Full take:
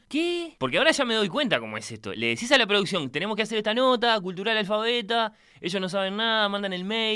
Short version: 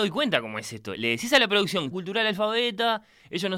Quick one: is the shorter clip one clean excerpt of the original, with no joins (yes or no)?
no